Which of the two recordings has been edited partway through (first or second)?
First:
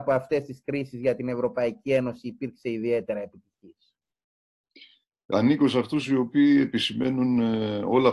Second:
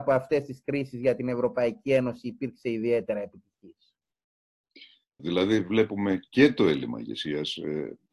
second